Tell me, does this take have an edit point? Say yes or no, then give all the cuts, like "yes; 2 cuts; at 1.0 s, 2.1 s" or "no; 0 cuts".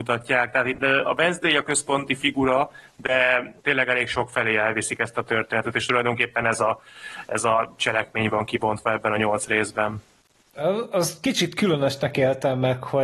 yes; 1 cut; at 3.6 s